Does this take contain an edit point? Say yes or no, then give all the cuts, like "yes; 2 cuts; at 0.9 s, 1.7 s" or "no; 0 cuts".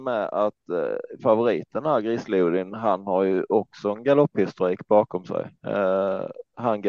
yes; 1 cut; at 5.6 s